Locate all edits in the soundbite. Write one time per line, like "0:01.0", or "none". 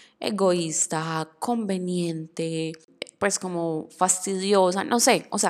none